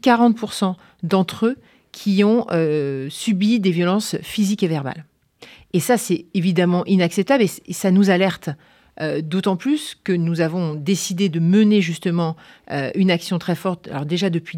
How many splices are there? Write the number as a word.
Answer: zero